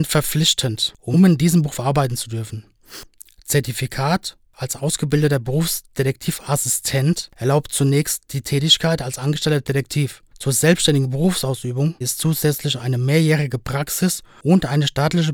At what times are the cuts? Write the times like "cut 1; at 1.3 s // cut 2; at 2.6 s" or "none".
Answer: cut 1; at 12.0 s